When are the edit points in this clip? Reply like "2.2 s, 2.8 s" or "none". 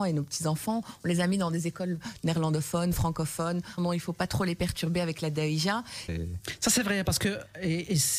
3.8 s, 6.1 s